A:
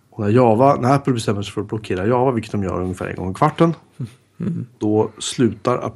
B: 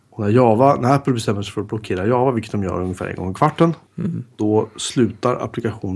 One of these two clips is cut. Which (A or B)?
B